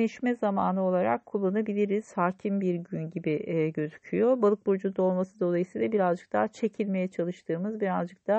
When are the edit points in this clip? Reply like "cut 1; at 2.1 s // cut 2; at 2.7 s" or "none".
none